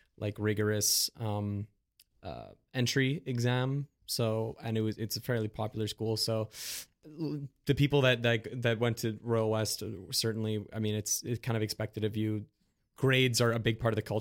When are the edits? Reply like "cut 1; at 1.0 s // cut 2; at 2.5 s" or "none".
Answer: cut 1; at 6.9 s